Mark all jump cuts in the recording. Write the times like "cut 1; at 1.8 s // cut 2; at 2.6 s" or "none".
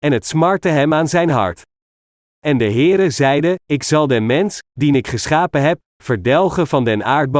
none